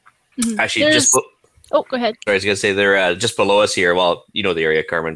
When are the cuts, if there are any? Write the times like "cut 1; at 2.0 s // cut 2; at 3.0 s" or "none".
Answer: cut 1; at 2.3 s

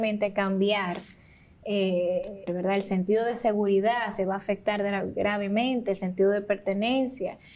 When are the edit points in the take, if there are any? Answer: cut 1; at 2.5 s

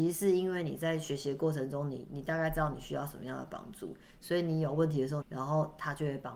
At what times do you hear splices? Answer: cut 1; at 5.2 s

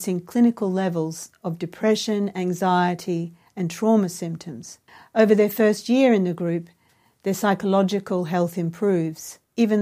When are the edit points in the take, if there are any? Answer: none

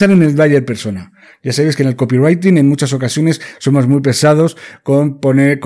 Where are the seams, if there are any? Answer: none

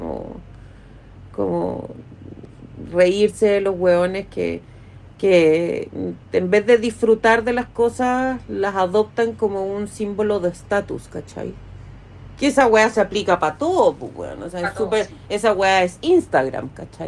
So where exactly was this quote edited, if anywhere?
none

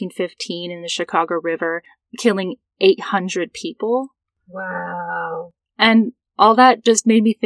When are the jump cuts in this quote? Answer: none

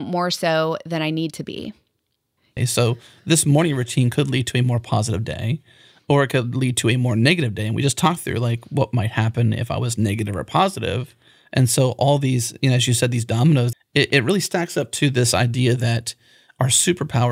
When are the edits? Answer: cut 1; at 2.6 s // cut 2; at 13.7 s

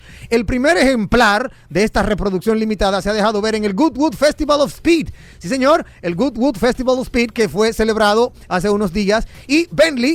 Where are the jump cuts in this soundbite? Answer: none

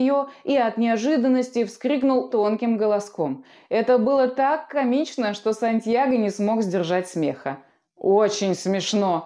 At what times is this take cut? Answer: cut 1; at 2.3 s

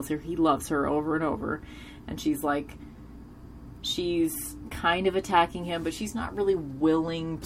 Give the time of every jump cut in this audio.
none

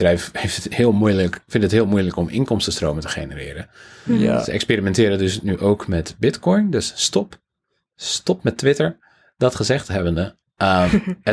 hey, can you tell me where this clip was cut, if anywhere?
none

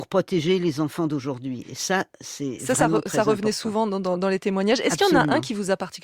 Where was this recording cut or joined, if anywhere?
none

